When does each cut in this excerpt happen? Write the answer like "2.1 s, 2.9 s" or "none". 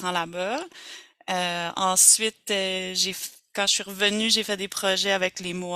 none